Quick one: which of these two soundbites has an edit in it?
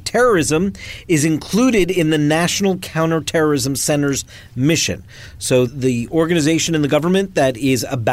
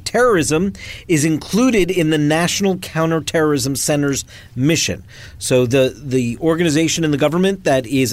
first; 1 cut; at 5.7 s

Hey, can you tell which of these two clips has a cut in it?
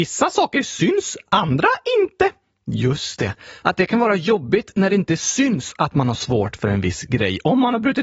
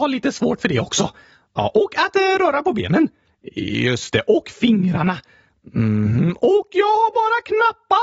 first; 1 cut; at 3.6 s

